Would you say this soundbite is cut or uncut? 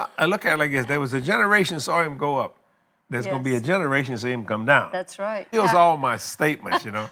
cut